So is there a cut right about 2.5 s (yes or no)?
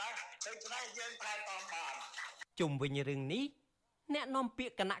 yes